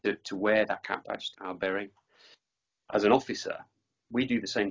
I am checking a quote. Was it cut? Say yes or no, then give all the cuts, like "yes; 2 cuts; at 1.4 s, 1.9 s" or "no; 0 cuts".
yes; 1 cut; at 1.3 s